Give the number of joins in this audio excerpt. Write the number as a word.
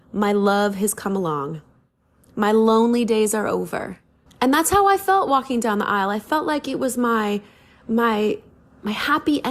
one